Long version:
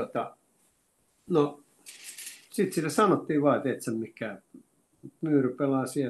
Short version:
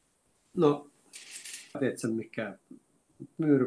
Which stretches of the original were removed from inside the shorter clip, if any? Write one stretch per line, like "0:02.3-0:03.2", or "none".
0:02.5-0:03.6